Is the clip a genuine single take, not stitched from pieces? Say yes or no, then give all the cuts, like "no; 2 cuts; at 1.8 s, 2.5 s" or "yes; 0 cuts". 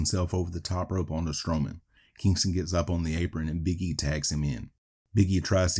yes; 0 cuts